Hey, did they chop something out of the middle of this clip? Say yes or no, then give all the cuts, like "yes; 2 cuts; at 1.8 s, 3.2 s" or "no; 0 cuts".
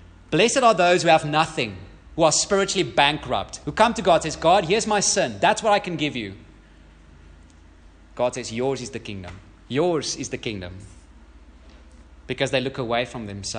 no; 0 cuts